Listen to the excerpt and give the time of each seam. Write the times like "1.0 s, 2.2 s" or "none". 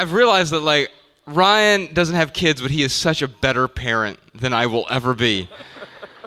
none

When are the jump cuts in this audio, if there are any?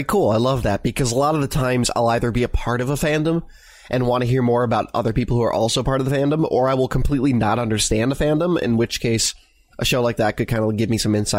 none

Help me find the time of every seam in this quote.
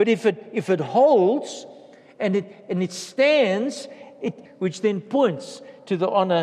4.5 s

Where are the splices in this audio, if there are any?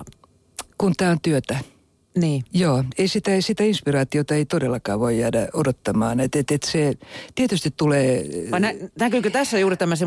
none

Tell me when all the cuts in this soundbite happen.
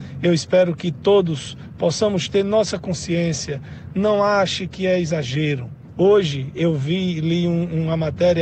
5.9 s

